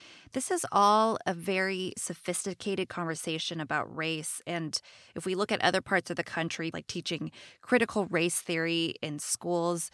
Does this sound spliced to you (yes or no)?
yes